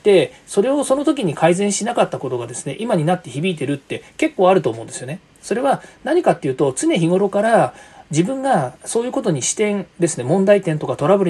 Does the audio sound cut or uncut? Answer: cut